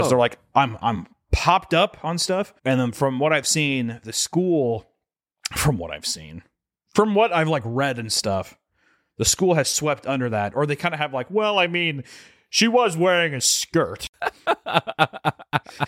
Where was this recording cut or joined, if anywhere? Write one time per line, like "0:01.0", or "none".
0:02.6